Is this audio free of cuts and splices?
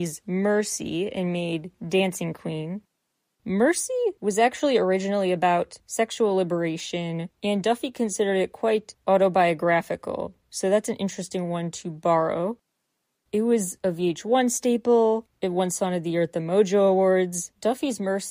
yes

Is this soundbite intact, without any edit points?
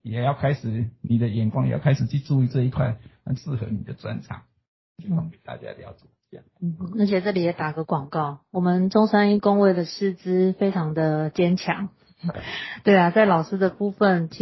no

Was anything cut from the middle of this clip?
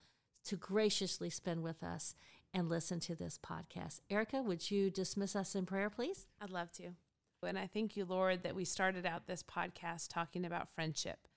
yes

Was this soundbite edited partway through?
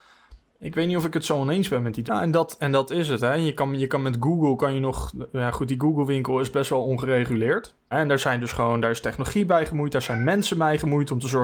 yes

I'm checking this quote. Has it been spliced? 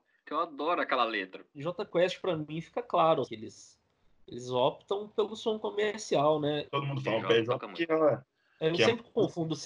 yes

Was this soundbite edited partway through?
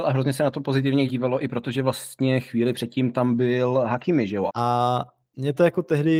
yes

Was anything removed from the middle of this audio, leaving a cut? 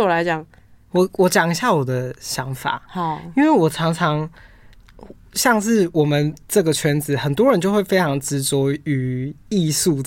yes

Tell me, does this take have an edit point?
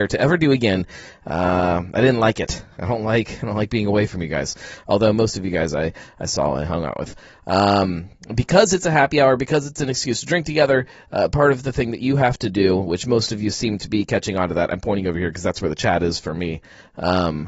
no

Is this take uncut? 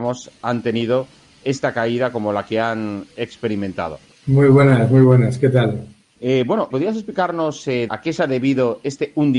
no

